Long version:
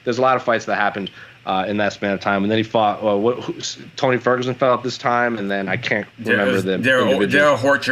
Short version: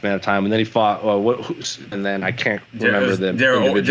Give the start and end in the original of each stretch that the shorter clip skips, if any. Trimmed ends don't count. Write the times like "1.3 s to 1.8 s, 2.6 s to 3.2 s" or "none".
3.9 s to 5.4 s